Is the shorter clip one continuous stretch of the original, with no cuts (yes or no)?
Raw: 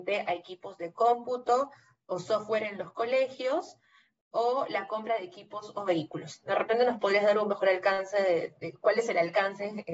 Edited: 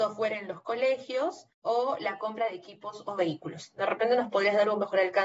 no